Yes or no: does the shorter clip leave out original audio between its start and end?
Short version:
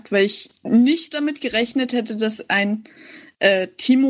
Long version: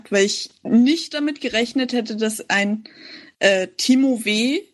no